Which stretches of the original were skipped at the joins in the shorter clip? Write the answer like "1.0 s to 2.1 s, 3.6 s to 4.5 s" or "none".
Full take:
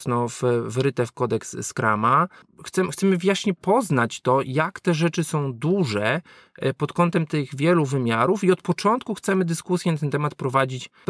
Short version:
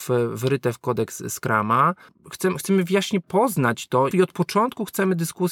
4.4 s to 8.4 s